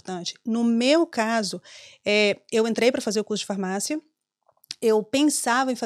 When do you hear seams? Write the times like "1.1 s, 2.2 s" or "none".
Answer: none